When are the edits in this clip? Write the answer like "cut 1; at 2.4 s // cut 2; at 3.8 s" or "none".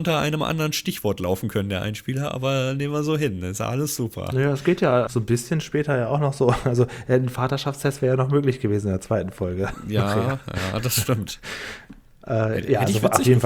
cut 1; at 5.1 s